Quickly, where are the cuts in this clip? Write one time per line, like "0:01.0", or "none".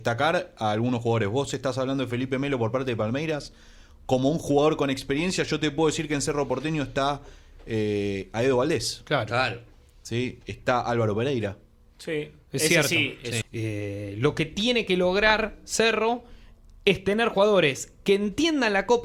0:10.4
0:13.4